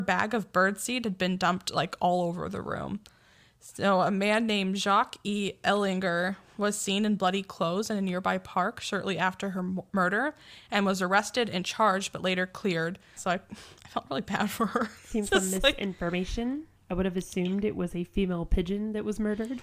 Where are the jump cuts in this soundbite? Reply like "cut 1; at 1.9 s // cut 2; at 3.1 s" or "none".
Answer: cut 1; at 13.2 s // cut 2; at 15.3 s